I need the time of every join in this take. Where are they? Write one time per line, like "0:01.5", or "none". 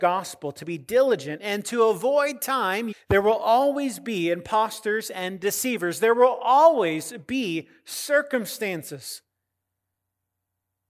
0:02.9